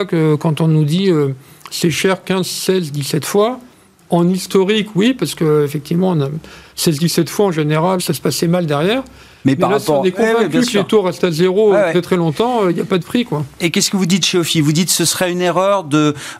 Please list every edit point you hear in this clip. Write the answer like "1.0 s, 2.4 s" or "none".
8.0 s